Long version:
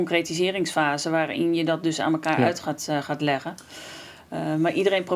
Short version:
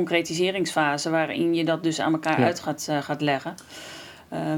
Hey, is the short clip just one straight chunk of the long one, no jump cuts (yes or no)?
yes